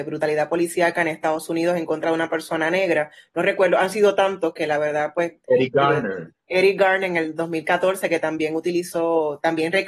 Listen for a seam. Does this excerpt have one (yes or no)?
no